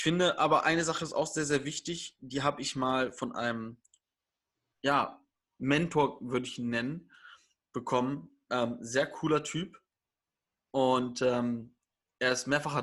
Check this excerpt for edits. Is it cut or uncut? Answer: uncut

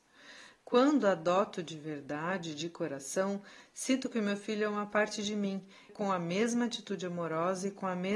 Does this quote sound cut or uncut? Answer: cut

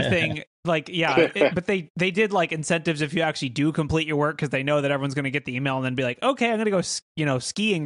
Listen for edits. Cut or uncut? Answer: uncut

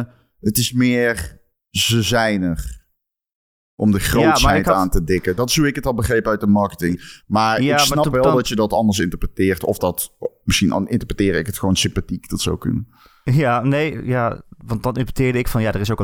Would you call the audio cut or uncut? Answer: cut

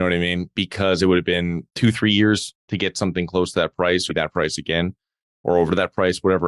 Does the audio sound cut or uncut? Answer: cut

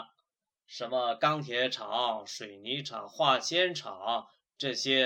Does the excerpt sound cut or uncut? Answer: uncut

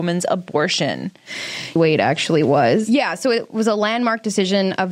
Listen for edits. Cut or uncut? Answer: cut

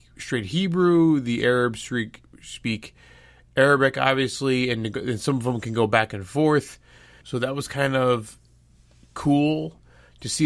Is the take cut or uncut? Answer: cut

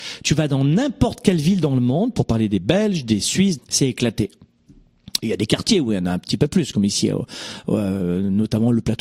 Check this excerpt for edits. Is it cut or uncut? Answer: cut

